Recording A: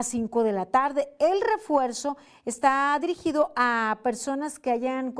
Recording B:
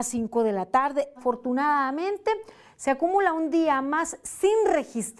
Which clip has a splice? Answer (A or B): B